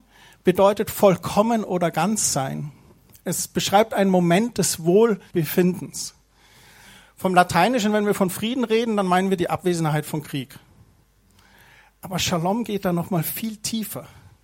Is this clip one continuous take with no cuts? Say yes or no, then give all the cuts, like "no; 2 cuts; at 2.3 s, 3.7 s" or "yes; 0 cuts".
yes; 0 cuts